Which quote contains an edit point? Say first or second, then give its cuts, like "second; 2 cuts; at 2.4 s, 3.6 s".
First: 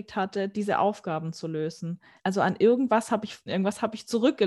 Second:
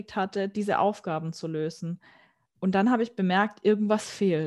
first; 2 cuts; at 2.2 s, 3.5 s